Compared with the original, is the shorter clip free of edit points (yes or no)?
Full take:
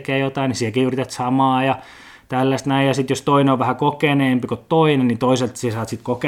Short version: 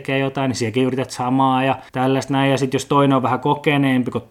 no